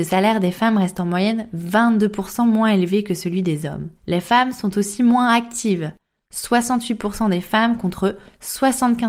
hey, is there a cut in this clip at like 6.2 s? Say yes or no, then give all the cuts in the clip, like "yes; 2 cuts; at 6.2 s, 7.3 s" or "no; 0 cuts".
no; 1 cut; at 4.0 s